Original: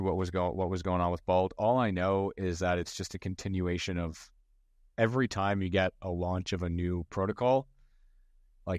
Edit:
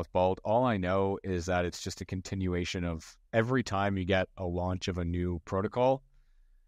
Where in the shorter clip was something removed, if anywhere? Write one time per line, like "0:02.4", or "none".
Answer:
0:03.3